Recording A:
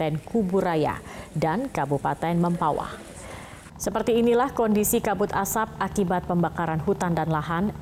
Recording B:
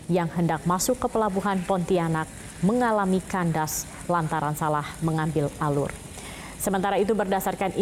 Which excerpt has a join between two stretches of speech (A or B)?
A